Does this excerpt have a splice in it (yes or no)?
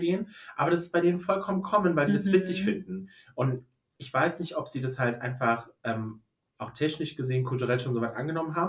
no